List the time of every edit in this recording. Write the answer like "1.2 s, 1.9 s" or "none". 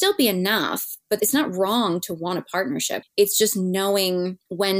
3.0 s